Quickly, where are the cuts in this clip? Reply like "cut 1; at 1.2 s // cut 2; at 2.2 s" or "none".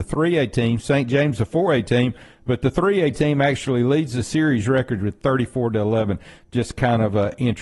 none